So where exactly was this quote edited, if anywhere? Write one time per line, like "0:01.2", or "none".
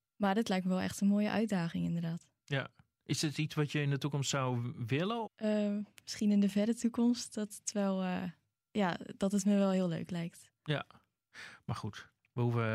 0:05.2